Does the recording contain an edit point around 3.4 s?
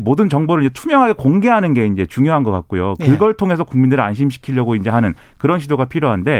no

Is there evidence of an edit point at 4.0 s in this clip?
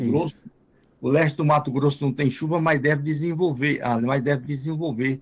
yes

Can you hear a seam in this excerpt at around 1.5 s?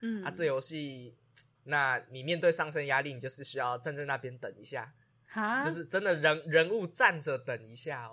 yes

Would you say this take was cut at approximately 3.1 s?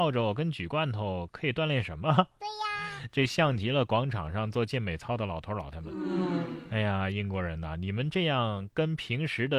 no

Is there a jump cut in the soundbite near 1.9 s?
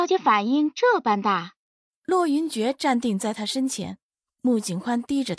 yes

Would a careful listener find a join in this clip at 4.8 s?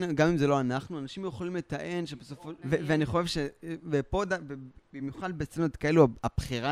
no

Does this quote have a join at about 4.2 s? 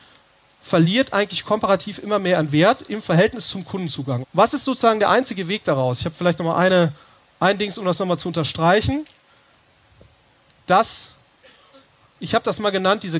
yes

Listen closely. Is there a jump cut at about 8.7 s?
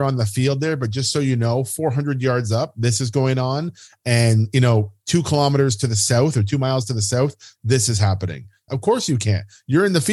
yes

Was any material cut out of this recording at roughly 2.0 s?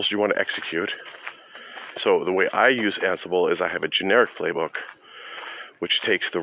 yes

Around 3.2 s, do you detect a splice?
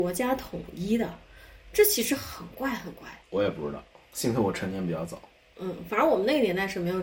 yes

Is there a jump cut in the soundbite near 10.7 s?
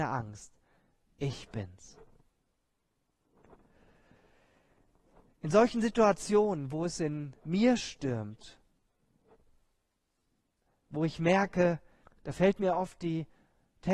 no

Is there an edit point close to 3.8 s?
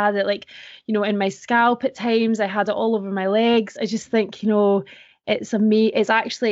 no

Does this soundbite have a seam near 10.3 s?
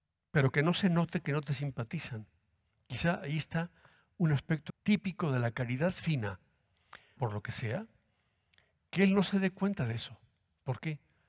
no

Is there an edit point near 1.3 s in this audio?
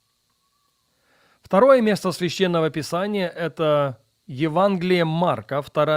no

